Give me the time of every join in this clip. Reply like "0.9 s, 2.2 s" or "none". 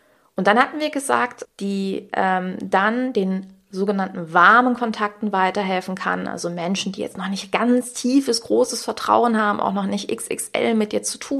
1.4 s